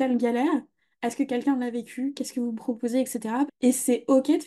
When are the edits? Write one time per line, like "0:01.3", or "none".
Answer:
0:03.5